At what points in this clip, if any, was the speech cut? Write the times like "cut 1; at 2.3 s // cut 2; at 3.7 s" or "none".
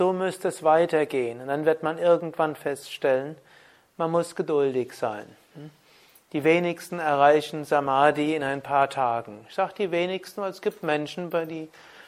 none